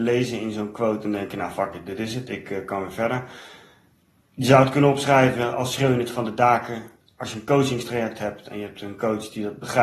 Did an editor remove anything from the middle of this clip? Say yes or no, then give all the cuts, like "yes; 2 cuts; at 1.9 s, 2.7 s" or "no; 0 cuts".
no; 0 cuts